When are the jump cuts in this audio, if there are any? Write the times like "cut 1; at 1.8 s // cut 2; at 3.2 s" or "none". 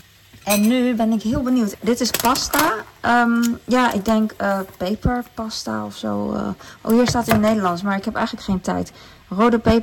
none